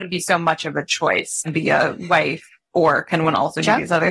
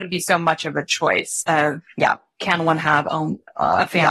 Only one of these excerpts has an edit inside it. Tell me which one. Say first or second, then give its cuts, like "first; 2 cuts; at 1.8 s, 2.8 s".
first; 1 cut; at 1.4 s